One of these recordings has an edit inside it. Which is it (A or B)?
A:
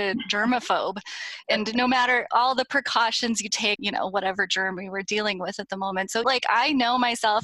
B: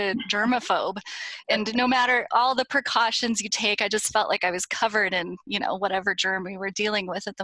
A